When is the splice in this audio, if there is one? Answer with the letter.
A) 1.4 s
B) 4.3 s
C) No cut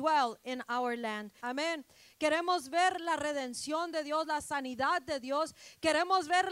A